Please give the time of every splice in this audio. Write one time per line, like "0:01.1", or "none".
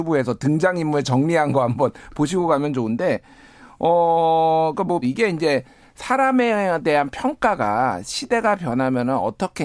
0:05.0